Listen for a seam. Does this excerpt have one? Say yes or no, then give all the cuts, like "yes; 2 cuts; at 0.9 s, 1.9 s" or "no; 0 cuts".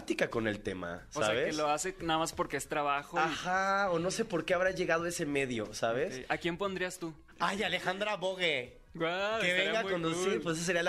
no; 0 cuts